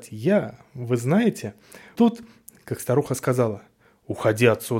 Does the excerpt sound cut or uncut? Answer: cut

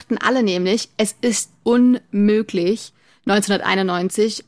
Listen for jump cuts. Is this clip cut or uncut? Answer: uncut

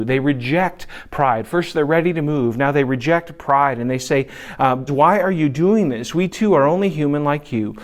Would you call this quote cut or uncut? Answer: cut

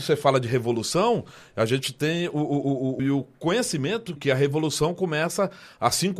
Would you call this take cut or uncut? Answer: cut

